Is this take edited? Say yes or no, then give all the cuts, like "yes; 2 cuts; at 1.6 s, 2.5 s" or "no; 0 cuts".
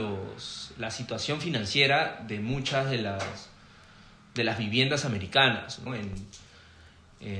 yes; 1 cut; at 5.9 s